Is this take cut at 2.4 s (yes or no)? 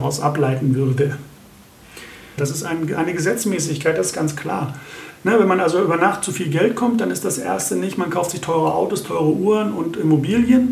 yes